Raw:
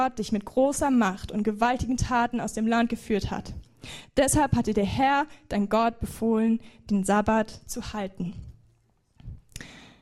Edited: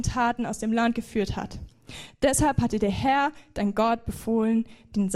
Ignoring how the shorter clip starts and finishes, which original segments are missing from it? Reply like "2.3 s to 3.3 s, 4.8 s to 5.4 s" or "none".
none